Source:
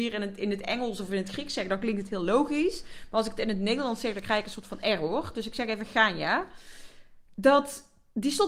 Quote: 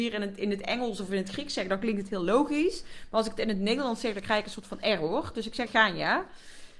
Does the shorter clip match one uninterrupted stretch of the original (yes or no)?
no